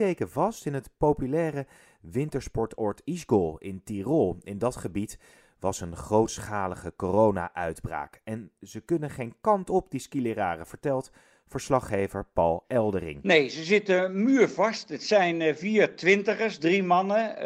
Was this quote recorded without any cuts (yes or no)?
yes